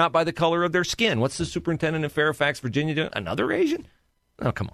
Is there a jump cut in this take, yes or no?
yes